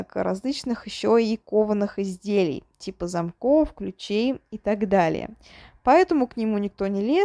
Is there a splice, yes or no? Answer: no